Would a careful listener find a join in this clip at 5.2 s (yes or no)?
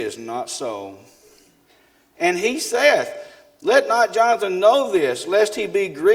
no